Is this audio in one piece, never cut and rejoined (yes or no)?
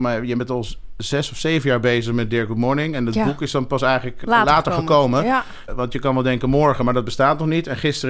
no